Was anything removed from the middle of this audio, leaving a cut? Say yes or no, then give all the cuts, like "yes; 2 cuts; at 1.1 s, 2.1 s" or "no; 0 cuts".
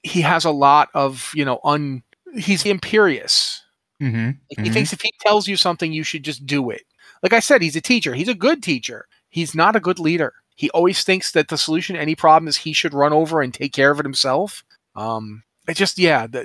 yes; 3 cuts; at 2.7 s, 10.5 s, 14.8 s